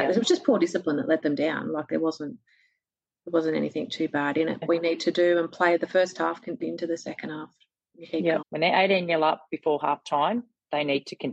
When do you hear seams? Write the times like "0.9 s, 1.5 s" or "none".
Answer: 4.6 s, 6.6 s, 8.4 s